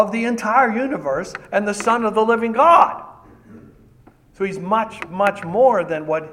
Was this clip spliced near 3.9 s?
no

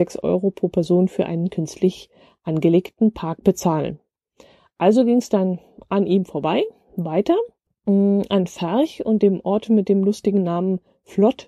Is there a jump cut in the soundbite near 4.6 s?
no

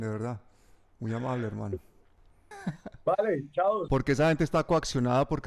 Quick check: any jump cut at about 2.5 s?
yes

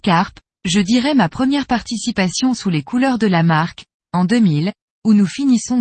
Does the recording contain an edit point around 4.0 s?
yes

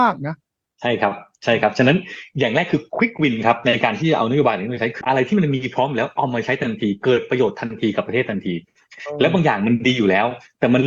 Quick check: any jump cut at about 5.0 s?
yes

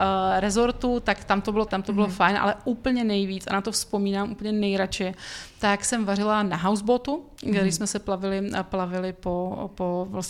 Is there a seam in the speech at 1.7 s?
yes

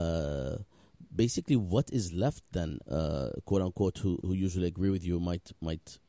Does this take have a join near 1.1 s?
no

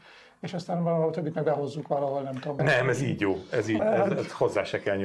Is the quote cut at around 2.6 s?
yes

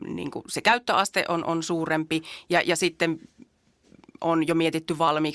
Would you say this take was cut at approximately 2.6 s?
no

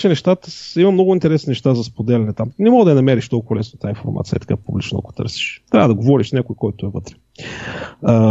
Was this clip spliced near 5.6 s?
no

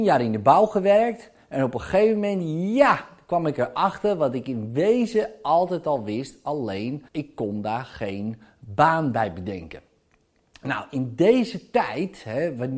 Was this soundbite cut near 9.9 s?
no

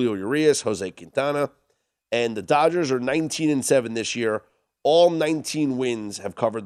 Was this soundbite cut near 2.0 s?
no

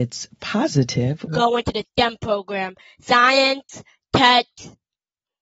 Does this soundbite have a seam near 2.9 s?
no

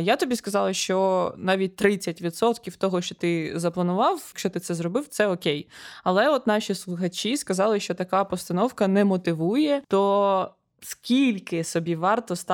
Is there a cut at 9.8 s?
yes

